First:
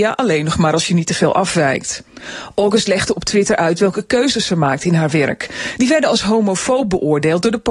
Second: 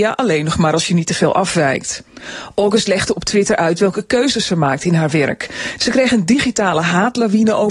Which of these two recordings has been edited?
second; 1 cut; at 5.8 s

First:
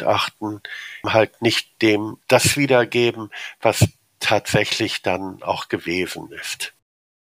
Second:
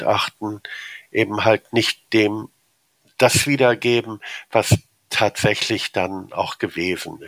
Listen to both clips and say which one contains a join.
first; 2 cuts; at 1.0 s, 2.2 s

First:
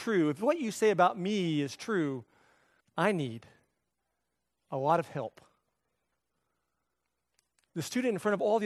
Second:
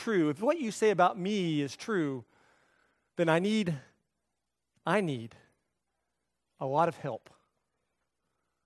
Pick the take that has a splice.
first; 1 cut; at 2.8 s

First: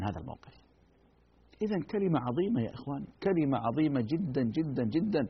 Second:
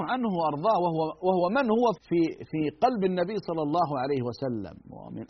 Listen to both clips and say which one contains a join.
second; 1 cut; at 2.0 s

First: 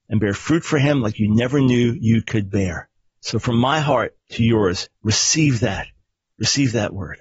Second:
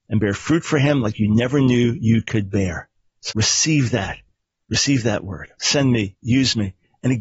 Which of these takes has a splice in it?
second; 2 cuts; at 3.3 s, 5.6 s

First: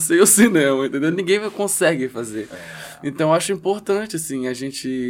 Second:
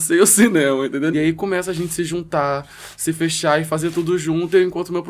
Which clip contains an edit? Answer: second; 1 cut; at 1.1 s

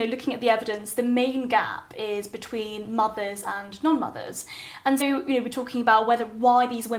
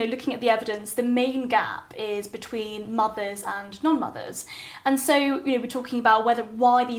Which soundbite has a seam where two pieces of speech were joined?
first; 1 cut; at 5.0 s

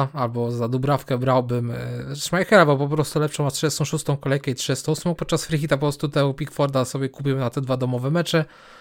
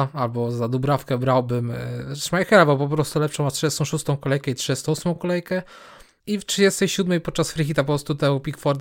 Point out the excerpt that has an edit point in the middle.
first; 1 cut; at 5.2 s

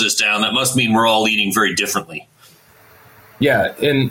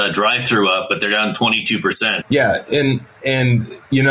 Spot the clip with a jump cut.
second; 1 cut; at 2.2 s

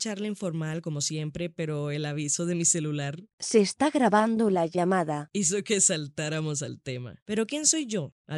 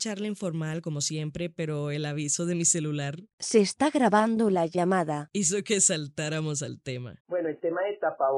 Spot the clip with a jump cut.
first; 1 cut; at 7.2 s

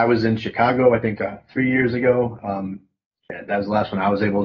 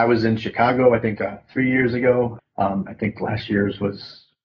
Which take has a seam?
second; 1 cut; at 2.4 s

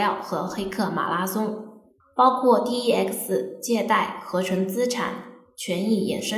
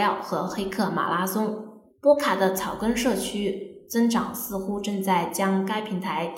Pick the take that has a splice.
first; 1 cut; at 2.0 s

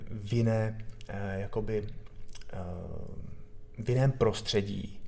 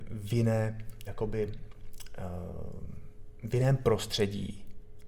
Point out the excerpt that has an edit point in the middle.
second; 1 cut; at 1.1 s

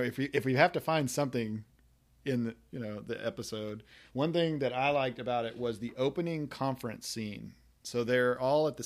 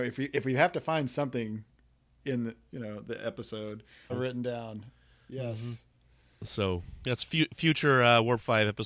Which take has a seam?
second; 1 cut; at 4.1 s

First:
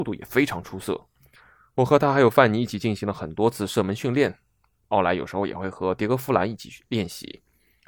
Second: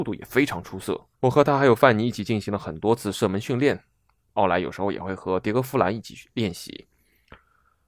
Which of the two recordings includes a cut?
second; 1 cut; at 1.1 s

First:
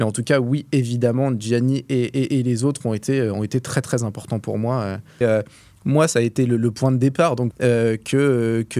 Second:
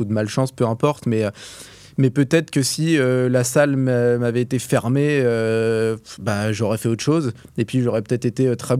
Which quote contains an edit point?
first; 2 cuts; at 5.2 s, 7.5 s

